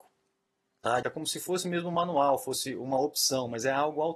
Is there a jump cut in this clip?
yes; 1 cut; at 1.0 s

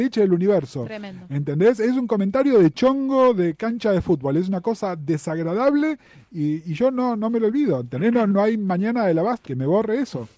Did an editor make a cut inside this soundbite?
yes; 2 cuts; at 8.3 s, 9.4 s

